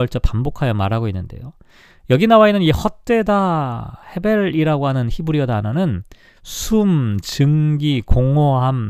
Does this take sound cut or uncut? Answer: uncut